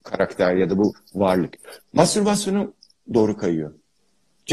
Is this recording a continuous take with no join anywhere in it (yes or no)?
no